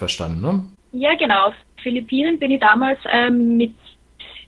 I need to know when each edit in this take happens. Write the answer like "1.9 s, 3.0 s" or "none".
none